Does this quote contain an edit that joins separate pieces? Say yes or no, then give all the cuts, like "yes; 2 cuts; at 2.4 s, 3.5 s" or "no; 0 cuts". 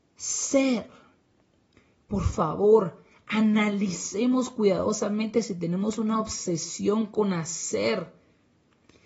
no; 0 cuts